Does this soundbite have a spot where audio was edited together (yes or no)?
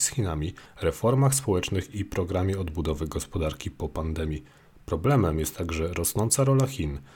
no